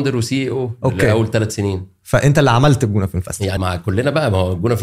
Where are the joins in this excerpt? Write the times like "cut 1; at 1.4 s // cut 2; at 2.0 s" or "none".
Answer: cut 1; at 3.6 s